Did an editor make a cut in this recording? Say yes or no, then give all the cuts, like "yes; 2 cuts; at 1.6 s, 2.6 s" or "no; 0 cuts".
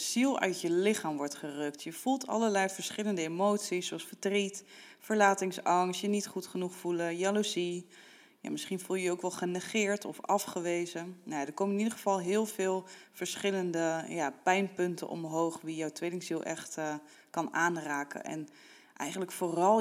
no; 0 cuts